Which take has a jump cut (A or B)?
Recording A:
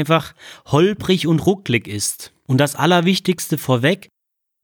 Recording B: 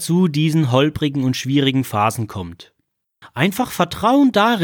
B